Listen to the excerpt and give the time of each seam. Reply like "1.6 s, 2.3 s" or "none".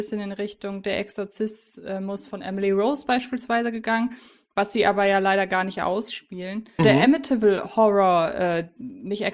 6.8 s